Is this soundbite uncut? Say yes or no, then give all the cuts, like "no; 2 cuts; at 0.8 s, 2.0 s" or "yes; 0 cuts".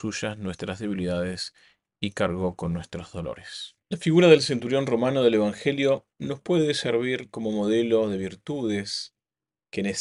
no; 2 cuts; at 3.8 s, 6.1 s